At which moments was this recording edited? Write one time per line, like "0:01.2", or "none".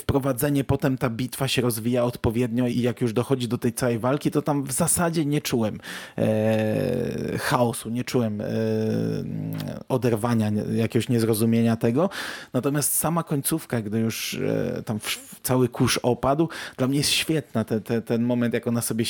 0:02.7